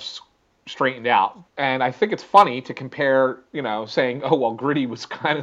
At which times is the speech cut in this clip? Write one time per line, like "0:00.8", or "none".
0:01.5